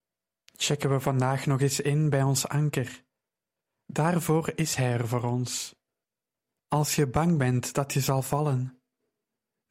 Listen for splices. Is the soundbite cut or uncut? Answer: cut